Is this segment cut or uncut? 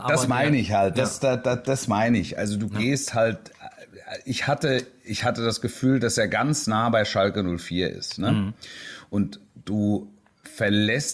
uncut